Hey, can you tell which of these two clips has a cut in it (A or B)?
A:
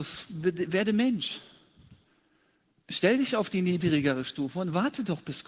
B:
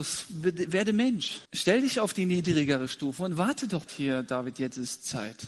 B